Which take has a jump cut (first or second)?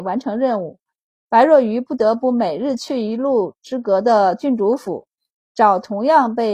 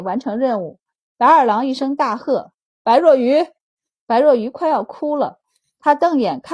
second